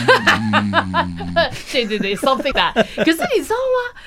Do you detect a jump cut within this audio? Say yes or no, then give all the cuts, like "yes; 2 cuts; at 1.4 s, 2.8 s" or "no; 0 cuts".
yes; 1 cut; at 2.5 s